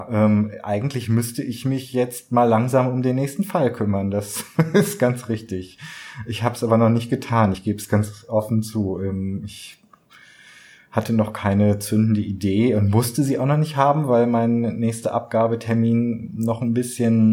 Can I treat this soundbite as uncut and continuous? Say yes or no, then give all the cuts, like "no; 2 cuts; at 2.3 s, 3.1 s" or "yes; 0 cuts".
yes; 0 cuts